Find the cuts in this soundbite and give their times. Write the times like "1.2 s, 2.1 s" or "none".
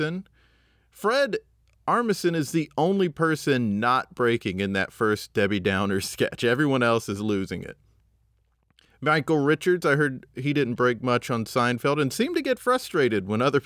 none